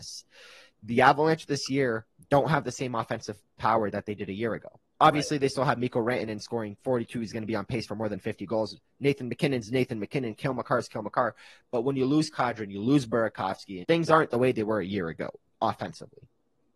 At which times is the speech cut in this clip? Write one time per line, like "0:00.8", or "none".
0:13.8